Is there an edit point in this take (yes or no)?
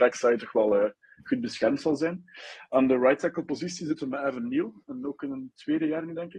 no